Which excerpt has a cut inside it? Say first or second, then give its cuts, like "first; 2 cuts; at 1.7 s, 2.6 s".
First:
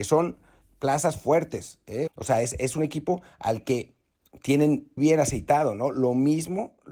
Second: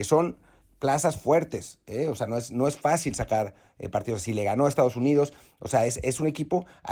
first; 2 cuts; at 2.1 s, 5.0 s